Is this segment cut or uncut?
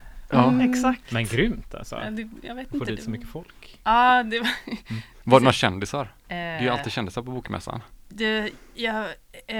cut